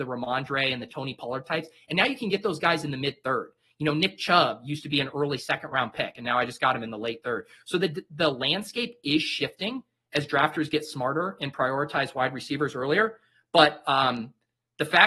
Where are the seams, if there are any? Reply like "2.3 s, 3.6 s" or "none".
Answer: none